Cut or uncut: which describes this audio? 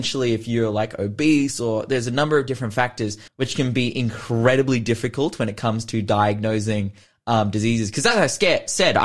cut